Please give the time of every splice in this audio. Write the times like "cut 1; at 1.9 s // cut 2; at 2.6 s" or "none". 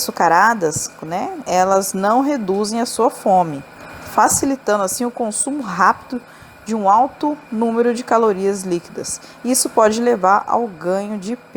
none